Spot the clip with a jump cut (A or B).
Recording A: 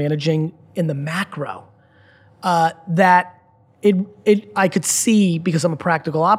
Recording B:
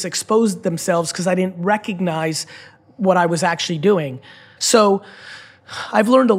B